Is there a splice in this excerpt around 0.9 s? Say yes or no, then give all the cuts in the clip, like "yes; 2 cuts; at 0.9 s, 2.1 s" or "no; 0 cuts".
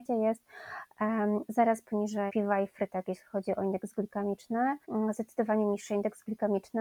no; 2 cuts; at 2.3 s, 4.8 s